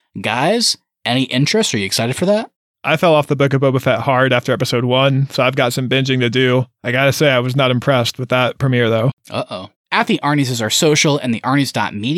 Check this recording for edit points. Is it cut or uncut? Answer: cut